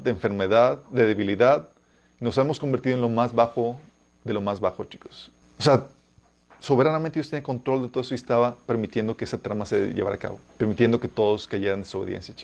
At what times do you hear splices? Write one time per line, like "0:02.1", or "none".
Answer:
0:05.4
0:10.5